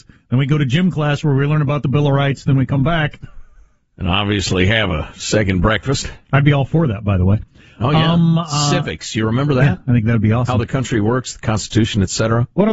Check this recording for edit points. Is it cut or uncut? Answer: uncut